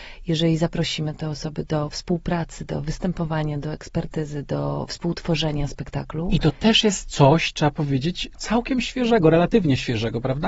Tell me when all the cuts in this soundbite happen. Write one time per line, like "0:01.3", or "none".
none